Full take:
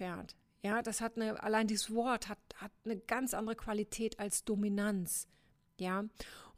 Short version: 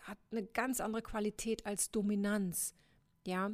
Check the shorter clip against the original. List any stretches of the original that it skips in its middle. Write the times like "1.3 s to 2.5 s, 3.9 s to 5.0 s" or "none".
none